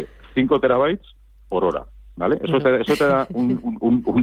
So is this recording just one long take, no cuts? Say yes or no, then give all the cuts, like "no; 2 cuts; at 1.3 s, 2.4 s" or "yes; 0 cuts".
yes; 0 cuts